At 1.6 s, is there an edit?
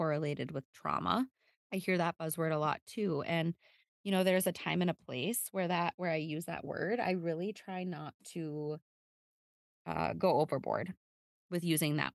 yes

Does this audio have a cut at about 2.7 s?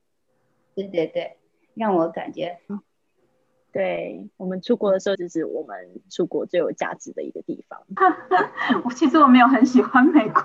yes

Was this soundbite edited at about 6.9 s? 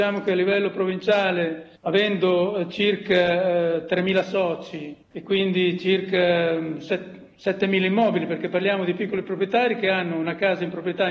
no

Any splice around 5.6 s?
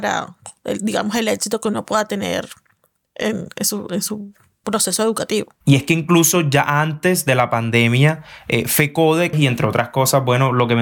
yes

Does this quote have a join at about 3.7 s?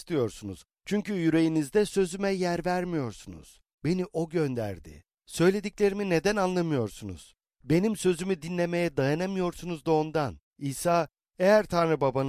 yes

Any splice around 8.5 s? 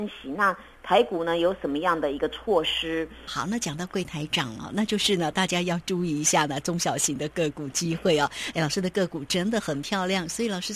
no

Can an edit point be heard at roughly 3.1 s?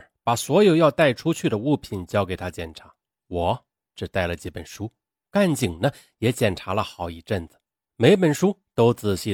yes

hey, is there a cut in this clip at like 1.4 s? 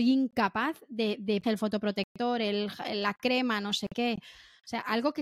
yes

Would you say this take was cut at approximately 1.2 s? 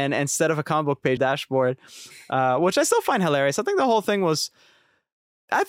yes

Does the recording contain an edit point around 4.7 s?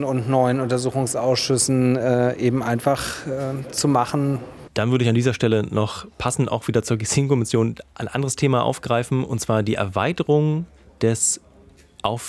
yes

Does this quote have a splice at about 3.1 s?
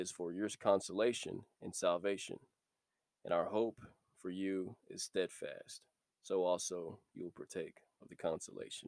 no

